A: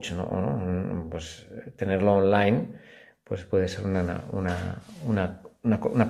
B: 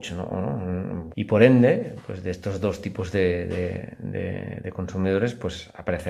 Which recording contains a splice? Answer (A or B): B